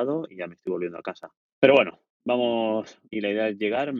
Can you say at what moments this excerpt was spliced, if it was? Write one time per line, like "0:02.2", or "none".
0:01.5
0:03.1

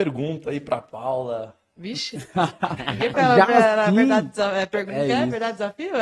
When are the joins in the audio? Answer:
0:03.1

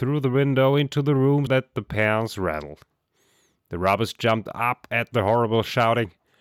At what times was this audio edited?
0:01.5

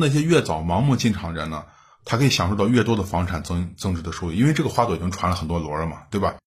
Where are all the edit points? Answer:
none

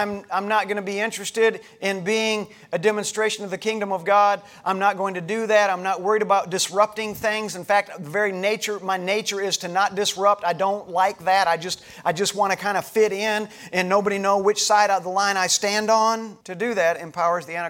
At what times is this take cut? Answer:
0:16.4

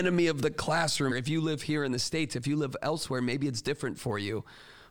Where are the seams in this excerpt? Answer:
0:01.1

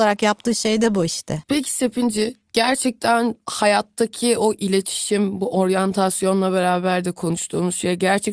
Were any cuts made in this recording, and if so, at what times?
none

